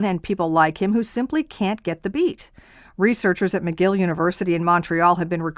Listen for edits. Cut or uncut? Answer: uncut